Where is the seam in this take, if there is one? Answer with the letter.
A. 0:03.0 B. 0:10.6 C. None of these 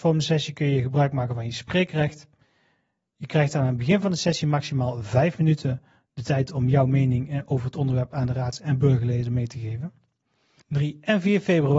B